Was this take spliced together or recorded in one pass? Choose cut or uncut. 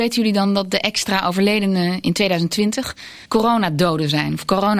cut